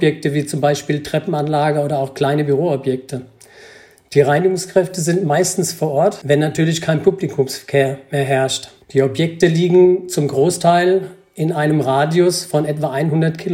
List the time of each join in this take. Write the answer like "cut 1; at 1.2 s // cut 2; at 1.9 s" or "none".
none